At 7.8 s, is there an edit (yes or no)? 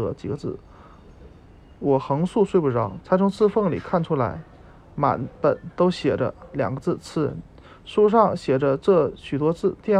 no